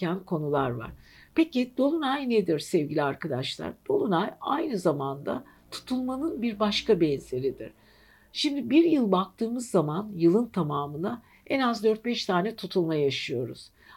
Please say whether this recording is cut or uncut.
uncut